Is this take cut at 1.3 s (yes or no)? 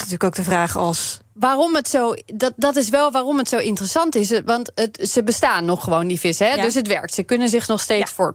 yes